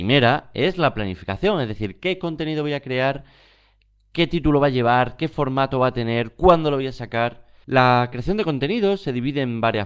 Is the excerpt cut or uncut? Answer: cut